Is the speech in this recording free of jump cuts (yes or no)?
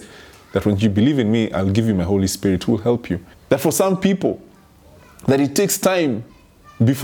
no